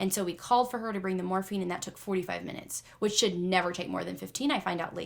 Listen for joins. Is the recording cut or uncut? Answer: uncut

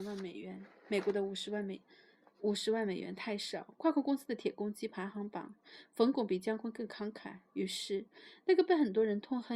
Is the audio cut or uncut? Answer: uncut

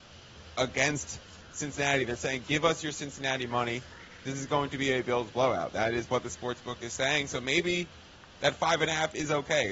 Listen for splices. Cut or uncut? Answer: uncut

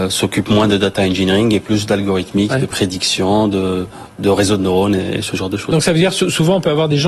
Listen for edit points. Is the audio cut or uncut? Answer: uncut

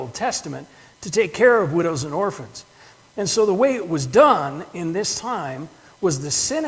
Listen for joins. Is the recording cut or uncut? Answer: uncut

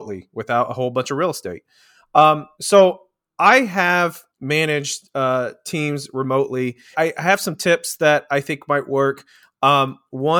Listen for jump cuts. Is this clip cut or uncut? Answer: cut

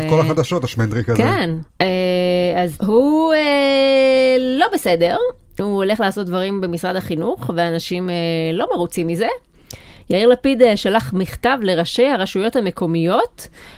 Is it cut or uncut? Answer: uncut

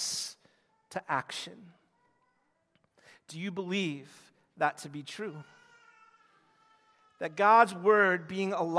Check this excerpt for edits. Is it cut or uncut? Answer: uncut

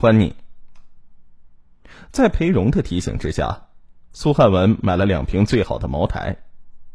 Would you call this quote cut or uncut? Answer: uncut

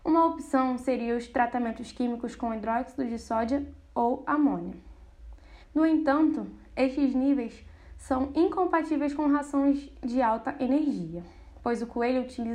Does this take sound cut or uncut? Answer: cut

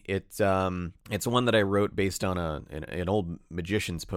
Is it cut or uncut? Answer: cut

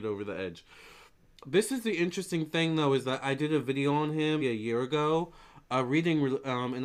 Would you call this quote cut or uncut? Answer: cut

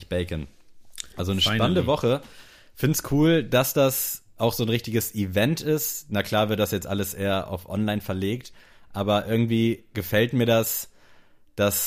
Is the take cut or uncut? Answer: uncut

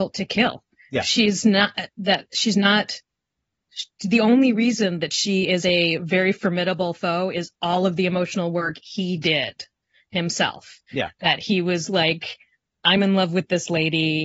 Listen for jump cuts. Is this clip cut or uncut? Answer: uncut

